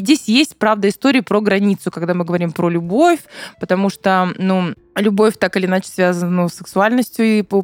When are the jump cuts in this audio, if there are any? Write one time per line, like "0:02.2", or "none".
none